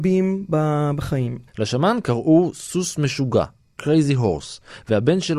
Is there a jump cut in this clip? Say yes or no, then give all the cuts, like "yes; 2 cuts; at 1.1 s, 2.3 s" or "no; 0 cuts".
yes; 1 cut; at 1.5 s